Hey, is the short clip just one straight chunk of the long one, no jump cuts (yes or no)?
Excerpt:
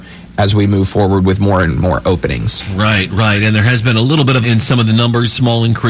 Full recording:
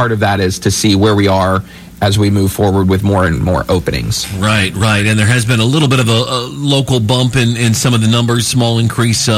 no